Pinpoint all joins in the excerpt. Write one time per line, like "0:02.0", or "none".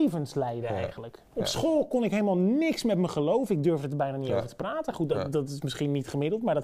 none